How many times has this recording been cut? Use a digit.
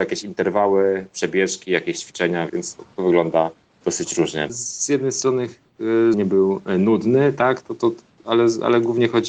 3